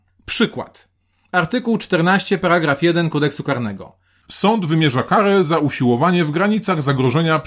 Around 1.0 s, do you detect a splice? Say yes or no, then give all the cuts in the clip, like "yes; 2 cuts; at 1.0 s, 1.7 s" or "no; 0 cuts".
no; 0 cuts